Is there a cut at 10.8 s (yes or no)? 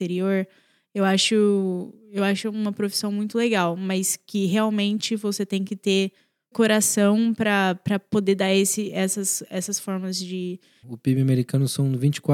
yes